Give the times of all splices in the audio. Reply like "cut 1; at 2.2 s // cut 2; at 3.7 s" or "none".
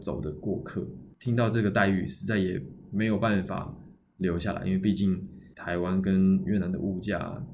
none